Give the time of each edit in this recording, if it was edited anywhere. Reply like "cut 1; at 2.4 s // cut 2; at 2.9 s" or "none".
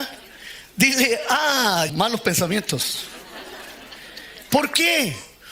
cut 1; at 1.9 s // cut 2; at 4.5 s